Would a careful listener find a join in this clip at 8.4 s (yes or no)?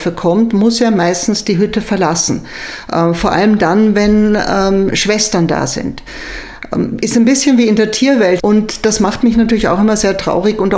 yes